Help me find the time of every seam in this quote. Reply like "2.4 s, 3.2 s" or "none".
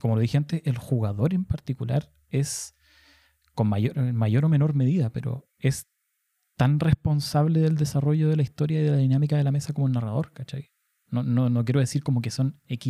none